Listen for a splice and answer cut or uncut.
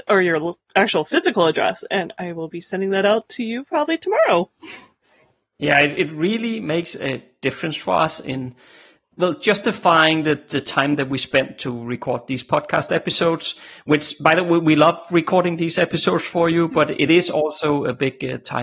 uncut